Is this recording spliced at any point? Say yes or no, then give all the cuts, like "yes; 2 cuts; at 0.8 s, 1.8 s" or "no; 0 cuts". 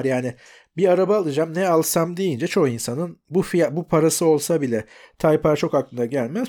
no; 0 cuts